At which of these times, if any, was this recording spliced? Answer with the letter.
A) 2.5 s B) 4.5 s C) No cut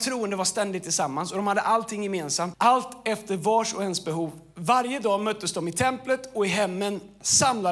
A